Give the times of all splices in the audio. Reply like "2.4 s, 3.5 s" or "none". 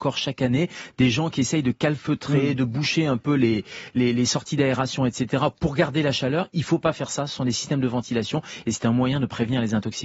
none